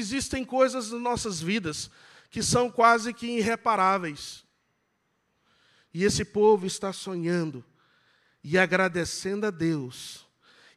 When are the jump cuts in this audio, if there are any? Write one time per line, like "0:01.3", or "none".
none